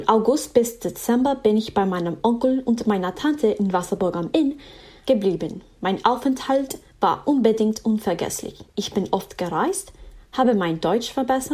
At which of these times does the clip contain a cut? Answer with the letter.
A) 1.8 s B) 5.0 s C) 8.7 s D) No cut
B